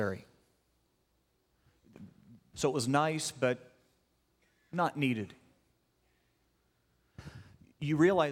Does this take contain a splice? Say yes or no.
yes